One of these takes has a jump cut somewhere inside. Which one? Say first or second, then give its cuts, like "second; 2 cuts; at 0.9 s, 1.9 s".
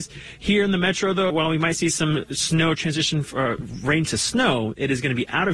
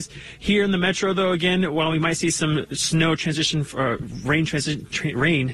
first; 2 cuts; at 1.3 s, 4.1 s